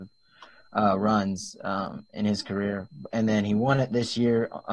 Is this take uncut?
yes; 0 cuts

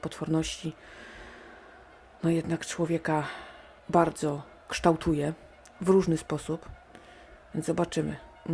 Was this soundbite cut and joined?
no; 0 cuts

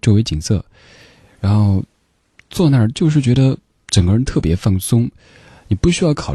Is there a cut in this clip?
no; 0 cuts

